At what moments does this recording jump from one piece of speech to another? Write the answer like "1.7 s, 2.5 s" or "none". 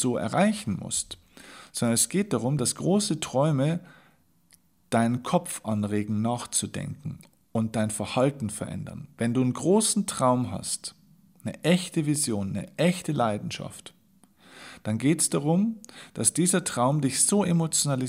none